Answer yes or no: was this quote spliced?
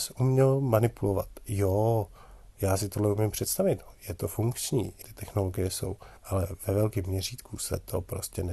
yes